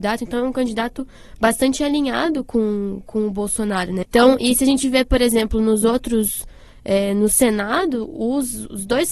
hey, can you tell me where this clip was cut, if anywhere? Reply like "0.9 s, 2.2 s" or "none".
4.0 s